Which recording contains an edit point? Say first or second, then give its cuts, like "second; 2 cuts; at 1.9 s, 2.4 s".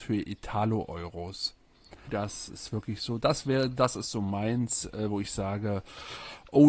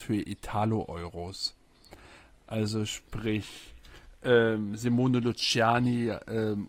first; 1 cut; at 2.1 s